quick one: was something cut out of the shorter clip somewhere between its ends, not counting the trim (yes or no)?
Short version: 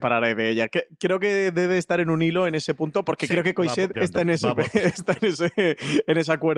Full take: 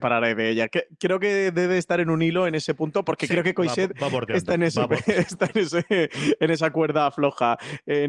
yes